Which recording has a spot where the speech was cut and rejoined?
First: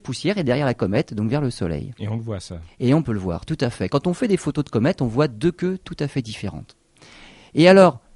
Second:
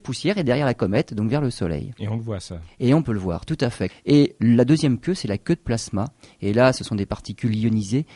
second; 1 cut; at 3.9 s

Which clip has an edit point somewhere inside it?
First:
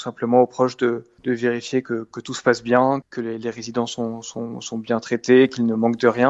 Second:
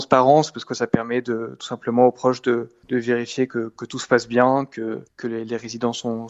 first; 1 cut; at 3.0 s

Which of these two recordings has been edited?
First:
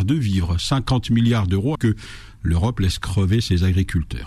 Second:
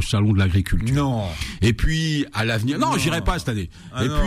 first; 1 cut; at 1.8 s

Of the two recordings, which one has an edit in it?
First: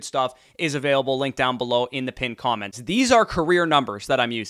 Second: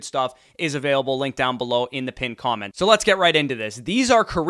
first; 1 cut; at 2.7 s

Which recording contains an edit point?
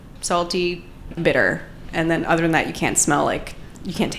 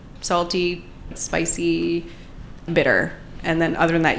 first; 1 cut; at 1.1 s

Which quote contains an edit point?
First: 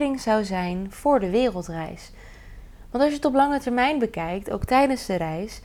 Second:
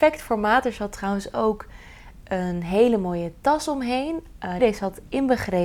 second; 1 cut; at 4.6 s

